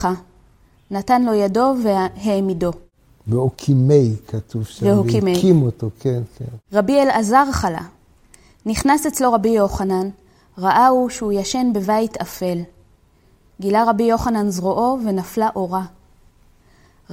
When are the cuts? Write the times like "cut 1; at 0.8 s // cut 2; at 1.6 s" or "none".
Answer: none